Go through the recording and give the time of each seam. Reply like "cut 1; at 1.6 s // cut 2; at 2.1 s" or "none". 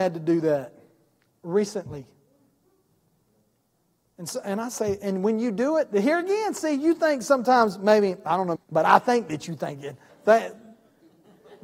cut 1; at 8.6 s // cut 2; at 10.1 s